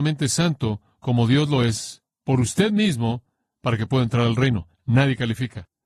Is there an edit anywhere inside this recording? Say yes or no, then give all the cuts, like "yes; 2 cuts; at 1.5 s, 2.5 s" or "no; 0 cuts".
no; 0 cuts